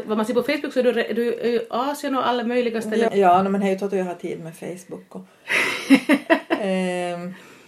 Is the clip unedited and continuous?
no; 1 cut; at 3.1 s

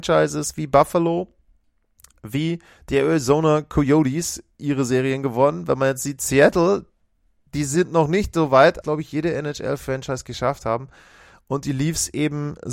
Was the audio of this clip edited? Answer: yes; 1 cut; at 8.8 s

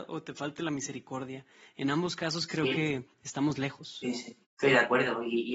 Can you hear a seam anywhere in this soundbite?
yes; 1 cut; at 4.4 s

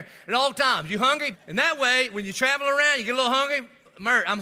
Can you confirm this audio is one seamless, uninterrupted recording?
no; 1 cut; at 1.3 s

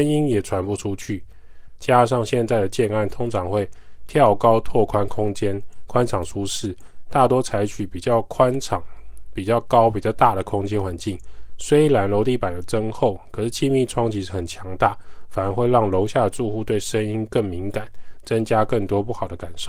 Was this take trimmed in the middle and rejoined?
yes; 2 cuts; at 1.8 s, 11.5 s

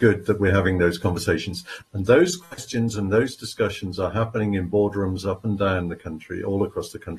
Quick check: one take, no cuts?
no; 1 cut; at 1.8 s

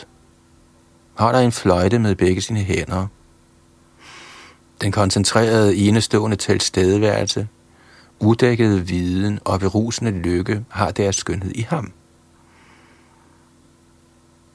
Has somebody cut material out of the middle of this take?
yes; 1 cut; at 4.6 s

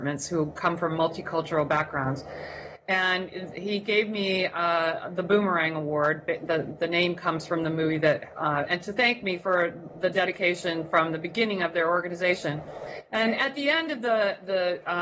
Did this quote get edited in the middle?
yes; 1 cut; at 8.7 s

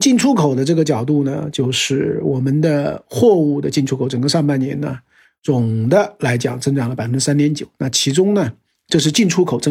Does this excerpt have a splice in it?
no; 0 cuts

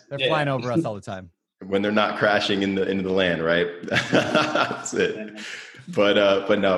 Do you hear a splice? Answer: no; 0 cuts

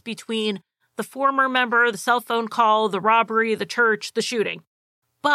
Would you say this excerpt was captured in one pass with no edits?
yes; 0 cuts

